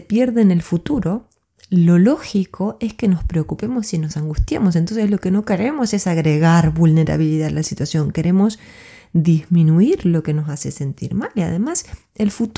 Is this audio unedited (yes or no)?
yes